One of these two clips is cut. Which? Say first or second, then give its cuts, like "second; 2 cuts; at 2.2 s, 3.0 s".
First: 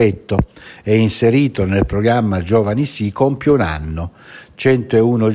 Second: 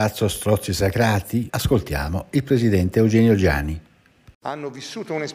second; 1 cut; at 1.5 s